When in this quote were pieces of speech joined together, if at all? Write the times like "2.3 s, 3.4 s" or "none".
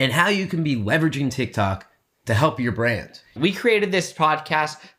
3.4 s

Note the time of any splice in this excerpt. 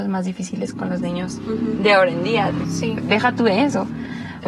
2.6 s

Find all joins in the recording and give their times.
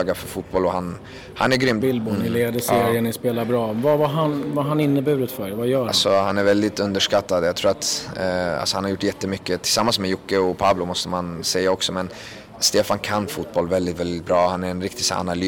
1.8 s

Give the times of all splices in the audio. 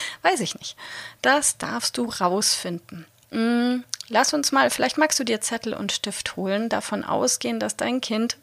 none

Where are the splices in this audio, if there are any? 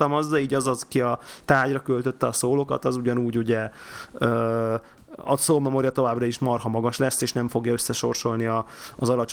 5.2 s

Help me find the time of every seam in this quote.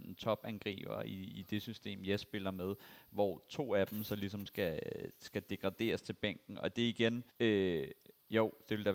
7.3 s

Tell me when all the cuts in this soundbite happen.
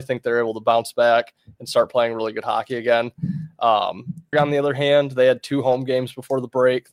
4.3 s

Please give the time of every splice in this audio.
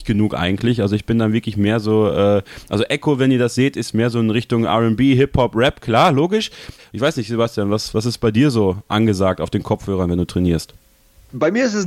6.8 s

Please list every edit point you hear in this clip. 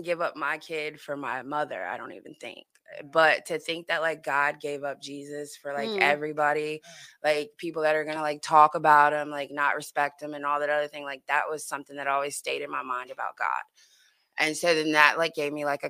none

